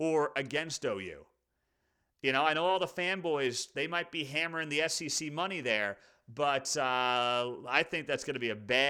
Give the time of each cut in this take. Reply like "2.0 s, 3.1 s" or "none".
none